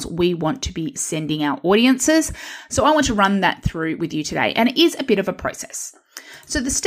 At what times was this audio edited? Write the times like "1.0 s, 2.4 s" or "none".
none